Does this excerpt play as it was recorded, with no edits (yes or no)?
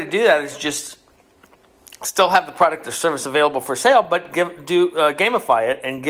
yes